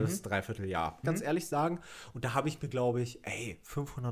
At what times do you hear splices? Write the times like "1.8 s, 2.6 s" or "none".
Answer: 1.0 s